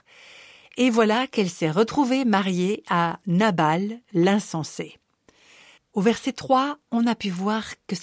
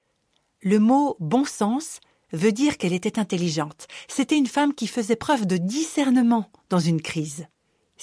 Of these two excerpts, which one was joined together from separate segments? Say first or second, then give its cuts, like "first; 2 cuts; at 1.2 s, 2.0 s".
first; 1 cut; at 5.8 s